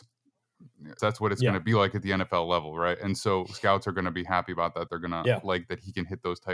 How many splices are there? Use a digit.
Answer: 2